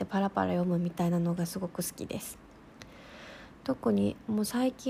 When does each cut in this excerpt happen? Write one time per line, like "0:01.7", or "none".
none